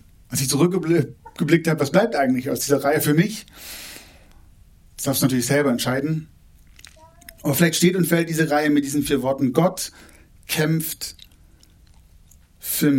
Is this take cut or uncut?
uncut